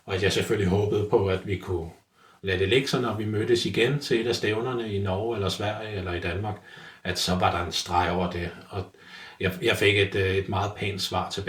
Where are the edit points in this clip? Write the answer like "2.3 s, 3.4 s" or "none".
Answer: none